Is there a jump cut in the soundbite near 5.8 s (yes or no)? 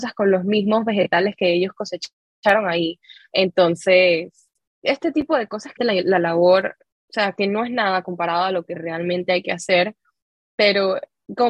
yes